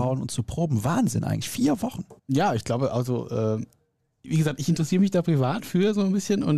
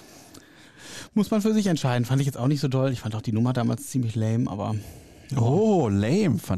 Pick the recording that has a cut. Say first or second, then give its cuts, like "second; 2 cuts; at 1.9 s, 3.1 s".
first; 1 cut; at 2.2 s